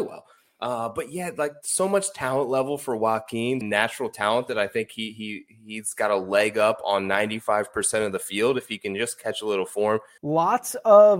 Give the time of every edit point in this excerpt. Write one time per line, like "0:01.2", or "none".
0:03.6
0:10.2